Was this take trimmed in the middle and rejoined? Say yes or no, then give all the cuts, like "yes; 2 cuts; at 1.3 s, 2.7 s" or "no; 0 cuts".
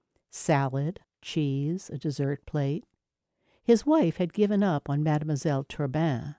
yes; 1 cut; at 1.0 s